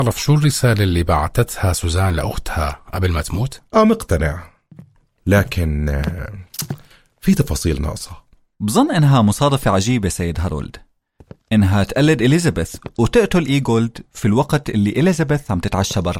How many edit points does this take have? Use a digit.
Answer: 1